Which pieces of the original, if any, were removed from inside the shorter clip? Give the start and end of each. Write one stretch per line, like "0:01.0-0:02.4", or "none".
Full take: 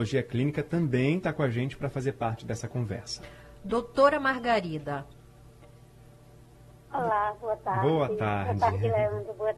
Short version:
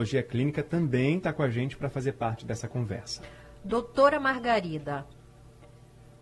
none